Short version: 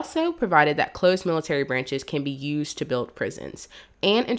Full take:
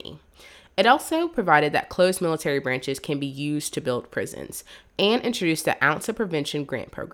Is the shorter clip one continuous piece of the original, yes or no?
yes